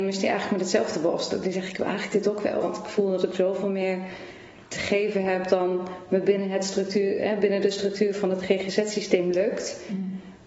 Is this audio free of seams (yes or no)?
no